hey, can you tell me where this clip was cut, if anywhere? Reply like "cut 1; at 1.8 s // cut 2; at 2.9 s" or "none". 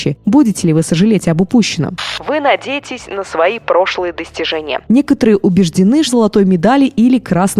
cut 1; at 6.1 s